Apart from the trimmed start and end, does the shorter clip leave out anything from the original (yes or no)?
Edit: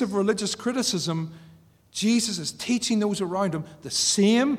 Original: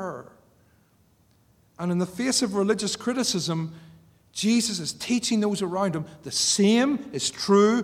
no